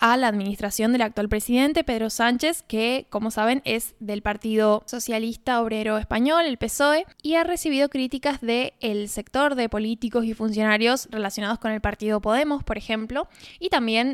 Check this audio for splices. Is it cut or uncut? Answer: uncut